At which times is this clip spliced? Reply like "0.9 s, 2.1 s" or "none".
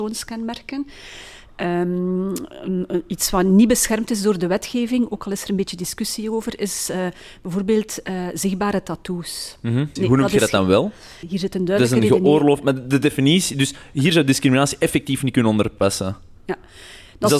10.0 s, 11.2 s